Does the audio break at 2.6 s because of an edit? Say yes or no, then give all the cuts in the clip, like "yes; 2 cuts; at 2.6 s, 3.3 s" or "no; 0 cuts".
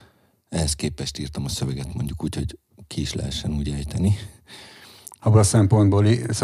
no; 1 cut; at 5.2 s